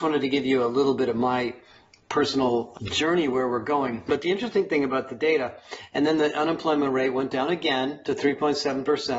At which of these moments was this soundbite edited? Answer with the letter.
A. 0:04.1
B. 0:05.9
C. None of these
A